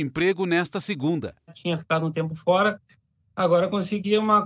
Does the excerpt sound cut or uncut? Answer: uncut